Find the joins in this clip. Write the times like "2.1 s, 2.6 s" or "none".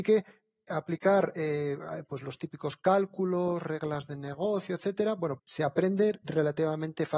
5.4 s